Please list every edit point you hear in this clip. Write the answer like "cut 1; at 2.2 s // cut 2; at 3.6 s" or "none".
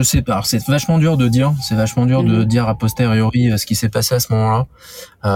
none